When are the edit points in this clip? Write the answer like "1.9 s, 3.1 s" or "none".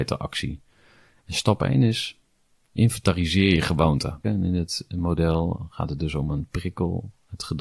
4.2 s